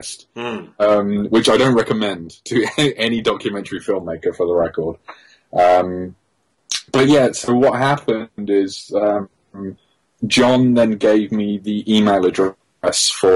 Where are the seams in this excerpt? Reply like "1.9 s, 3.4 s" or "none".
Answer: none